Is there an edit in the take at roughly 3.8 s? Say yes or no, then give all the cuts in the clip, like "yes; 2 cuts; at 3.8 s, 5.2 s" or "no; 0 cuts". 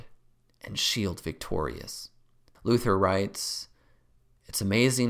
no; 1 cut; at 2.5 s